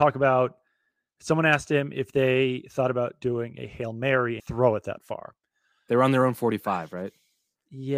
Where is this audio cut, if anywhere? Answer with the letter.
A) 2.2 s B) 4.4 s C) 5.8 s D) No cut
B